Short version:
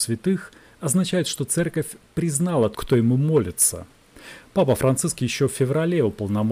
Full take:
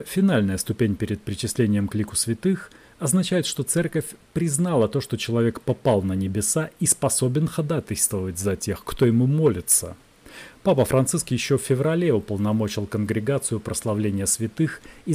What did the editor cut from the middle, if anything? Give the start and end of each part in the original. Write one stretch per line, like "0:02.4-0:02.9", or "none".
0:04.9-0:08.8